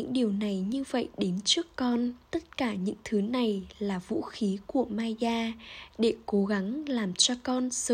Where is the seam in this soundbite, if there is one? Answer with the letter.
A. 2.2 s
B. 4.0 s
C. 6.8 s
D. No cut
A